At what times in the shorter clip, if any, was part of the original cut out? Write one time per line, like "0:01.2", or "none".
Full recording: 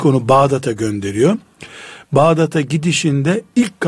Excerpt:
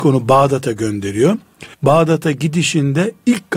0:01.7

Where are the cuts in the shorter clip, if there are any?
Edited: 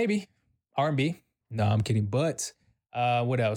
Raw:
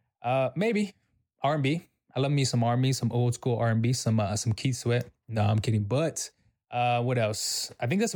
0:01.4

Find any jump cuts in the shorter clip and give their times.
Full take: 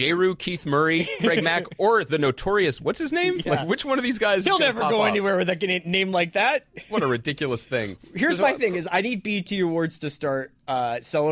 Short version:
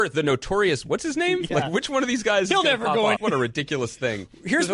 0:03.2

